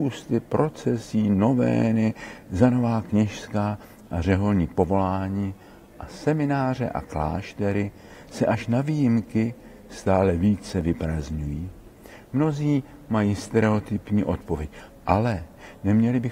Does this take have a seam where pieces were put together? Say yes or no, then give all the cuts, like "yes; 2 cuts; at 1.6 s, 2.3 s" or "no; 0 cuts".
yes; 1 cut; at 14.9 s